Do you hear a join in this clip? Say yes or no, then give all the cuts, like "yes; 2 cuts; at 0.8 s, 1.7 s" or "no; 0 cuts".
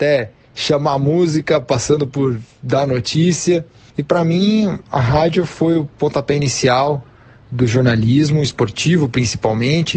yes; 1 cut; at 3.9 s